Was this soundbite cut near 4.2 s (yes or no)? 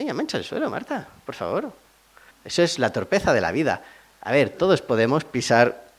no